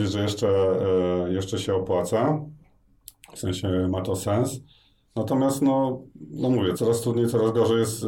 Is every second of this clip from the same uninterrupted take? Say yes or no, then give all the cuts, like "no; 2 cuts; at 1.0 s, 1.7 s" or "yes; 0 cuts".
no; 1 cut; at 6.7 s